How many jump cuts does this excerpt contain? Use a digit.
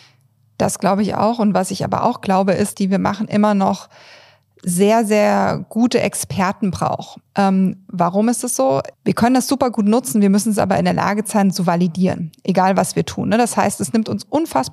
2